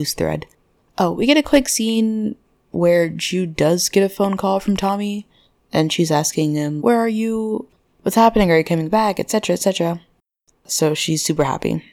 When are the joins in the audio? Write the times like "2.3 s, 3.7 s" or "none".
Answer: 6.8 s, 10.5 s